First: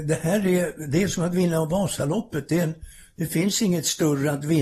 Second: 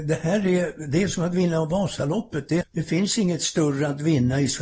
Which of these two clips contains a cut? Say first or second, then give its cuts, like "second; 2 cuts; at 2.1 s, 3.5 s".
second; 1 cut; at 2.6 s